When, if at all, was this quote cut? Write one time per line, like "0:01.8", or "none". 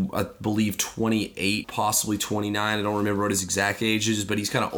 0:01.6